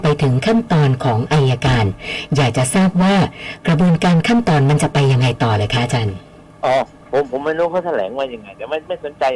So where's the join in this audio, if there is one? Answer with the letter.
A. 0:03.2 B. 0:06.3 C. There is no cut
C